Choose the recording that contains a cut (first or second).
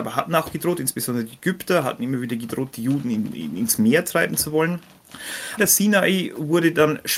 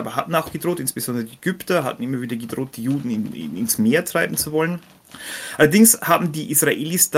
first